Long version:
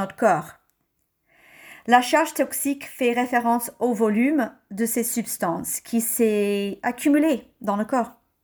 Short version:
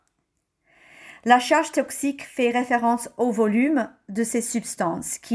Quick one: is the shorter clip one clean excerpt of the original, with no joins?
yes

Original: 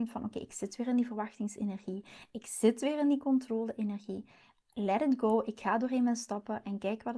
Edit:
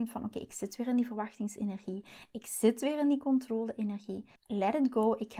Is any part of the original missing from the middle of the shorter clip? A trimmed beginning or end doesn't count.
yes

